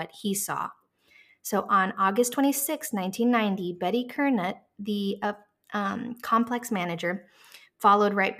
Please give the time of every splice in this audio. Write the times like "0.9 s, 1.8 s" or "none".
none